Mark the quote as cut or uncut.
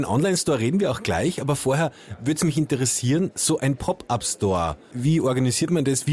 cut